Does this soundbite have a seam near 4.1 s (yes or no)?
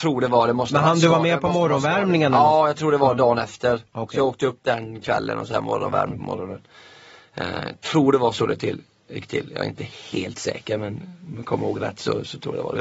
no